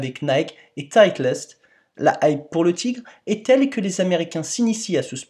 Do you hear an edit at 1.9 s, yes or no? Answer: yes